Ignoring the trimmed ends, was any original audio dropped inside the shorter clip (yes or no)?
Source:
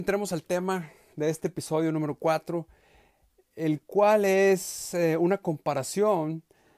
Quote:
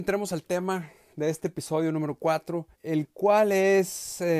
yes